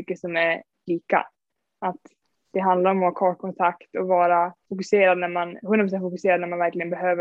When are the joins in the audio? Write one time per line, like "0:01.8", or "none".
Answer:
0:04.6